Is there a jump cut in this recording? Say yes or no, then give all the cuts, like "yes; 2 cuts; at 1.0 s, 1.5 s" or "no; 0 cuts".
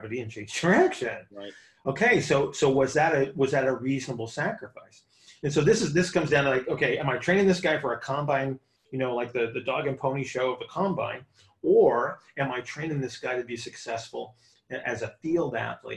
no; 0 cuts